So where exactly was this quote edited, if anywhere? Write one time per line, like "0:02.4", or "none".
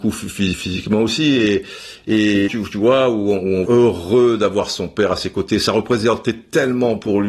0:02.5
0:03.6